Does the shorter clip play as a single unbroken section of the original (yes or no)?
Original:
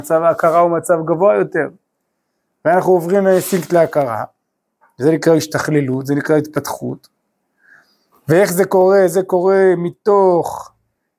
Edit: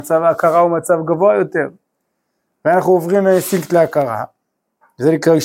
yes